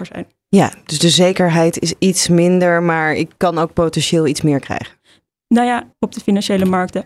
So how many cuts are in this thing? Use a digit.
1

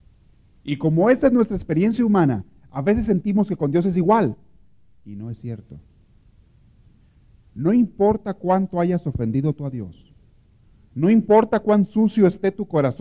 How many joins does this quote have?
0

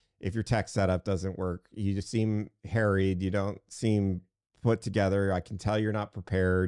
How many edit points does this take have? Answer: 0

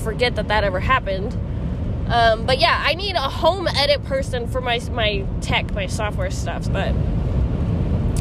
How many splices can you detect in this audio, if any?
1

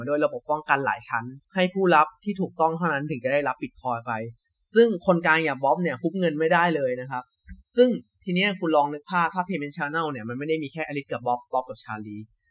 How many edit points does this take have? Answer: 1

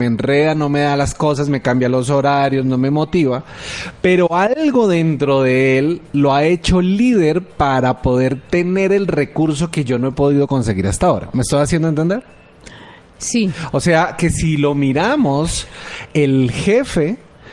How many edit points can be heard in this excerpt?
0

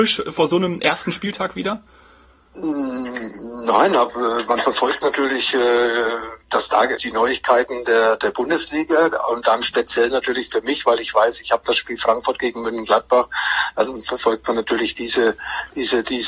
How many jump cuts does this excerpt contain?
1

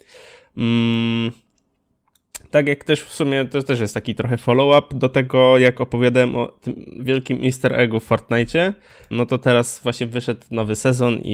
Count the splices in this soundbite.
1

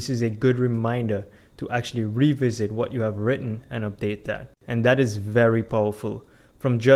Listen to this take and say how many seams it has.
1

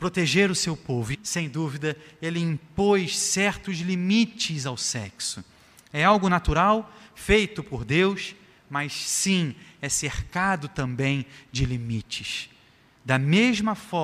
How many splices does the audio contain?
1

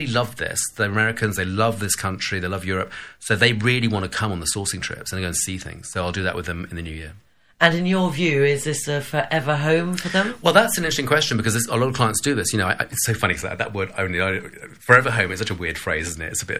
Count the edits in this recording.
0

